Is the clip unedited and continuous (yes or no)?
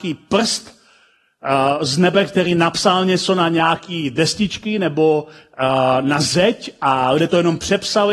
yes